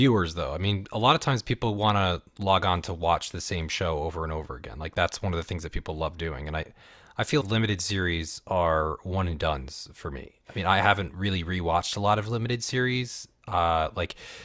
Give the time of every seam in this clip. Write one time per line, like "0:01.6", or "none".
0:07.4